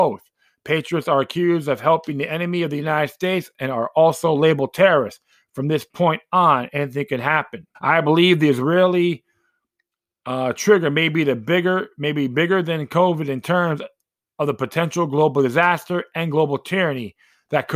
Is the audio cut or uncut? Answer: cut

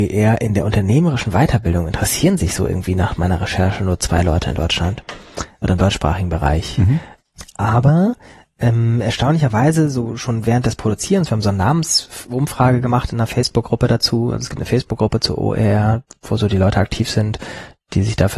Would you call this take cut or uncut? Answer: uncut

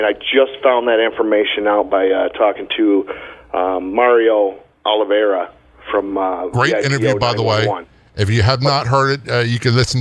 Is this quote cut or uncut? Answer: uncut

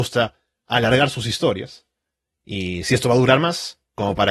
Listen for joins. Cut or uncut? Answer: uncut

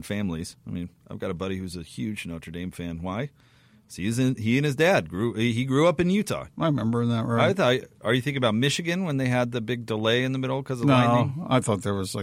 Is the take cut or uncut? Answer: cut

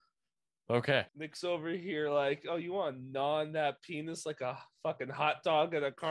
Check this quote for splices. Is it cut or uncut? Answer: cut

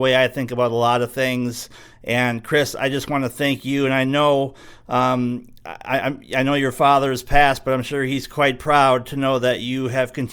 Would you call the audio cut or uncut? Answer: uncut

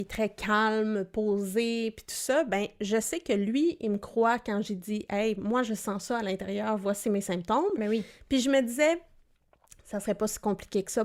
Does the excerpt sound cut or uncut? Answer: uncut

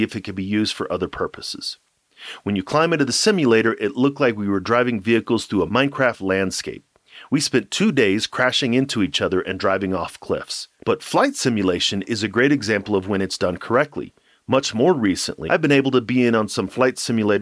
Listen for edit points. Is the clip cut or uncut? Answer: cut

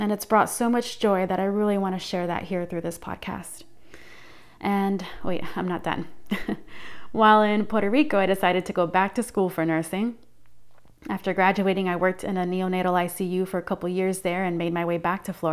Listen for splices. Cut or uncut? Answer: uncut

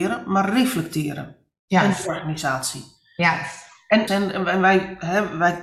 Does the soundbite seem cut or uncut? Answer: cut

